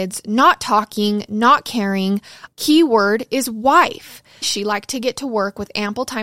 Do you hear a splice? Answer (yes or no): yes